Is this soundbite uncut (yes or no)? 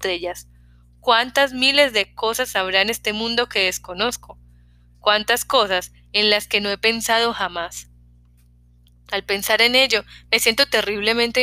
yes